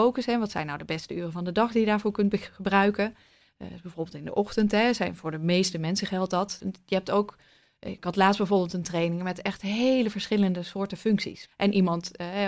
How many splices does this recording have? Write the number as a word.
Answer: two